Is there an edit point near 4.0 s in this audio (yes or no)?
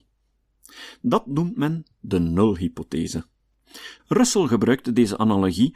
yes